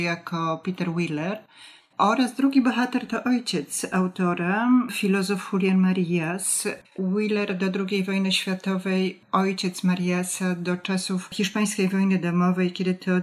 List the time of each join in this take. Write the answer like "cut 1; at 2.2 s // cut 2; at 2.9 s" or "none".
cut 1; at 6.8 s